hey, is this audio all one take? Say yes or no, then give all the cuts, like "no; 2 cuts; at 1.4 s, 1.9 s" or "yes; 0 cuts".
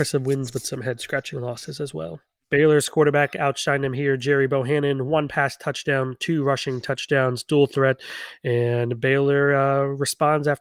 no; 1 cut; at 2.4 s